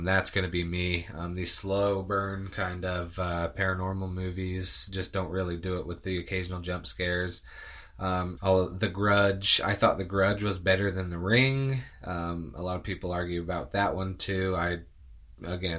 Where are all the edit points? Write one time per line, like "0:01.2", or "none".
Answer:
0:08.4